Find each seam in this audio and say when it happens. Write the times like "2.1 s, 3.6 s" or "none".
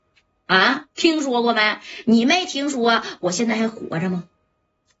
2.0 s